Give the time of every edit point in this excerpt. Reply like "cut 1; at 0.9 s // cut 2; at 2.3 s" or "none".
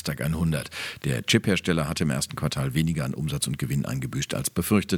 cut 1; at 1.0 s